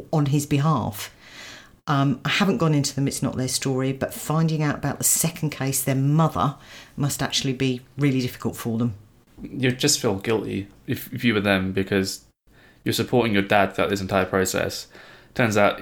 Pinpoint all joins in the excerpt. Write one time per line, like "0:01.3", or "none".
none

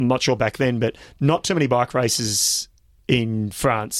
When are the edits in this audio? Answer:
none

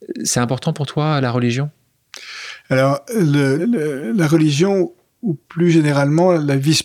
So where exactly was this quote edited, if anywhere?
0:03.6

